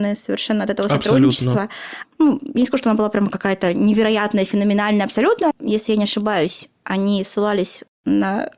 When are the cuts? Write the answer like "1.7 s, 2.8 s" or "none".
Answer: 2.0 s, 5.5 s, 7.2 s